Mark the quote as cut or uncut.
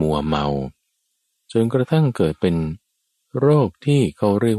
uncut